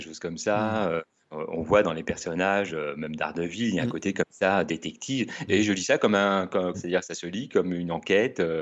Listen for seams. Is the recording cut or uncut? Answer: cut